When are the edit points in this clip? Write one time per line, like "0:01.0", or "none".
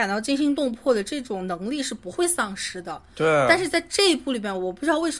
none